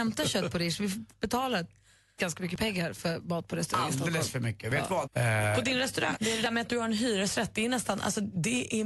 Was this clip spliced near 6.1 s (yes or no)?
yes